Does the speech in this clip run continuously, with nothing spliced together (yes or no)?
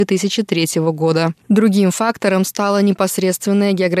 no